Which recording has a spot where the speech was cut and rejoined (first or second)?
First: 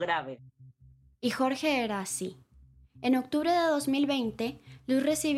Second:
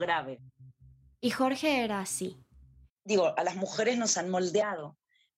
second